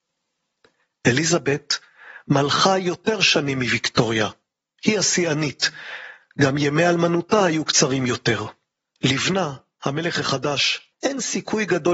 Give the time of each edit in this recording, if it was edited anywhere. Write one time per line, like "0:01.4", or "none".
0:10.9